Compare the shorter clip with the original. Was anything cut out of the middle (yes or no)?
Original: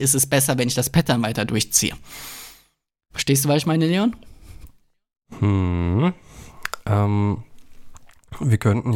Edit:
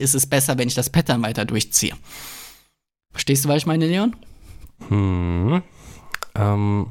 yes